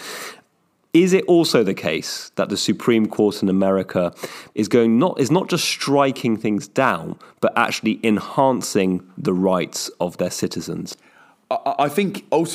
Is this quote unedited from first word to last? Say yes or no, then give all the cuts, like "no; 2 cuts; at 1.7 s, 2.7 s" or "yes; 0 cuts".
no; 1 cut; at 4.5 s